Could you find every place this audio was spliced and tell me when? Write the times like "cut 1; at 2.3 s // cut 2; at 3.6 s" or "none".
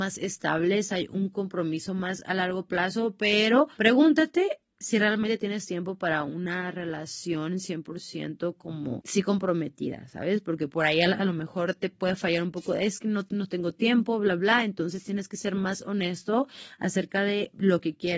none